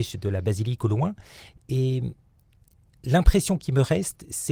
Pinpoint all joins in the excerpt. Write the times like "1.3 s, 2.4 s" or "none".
none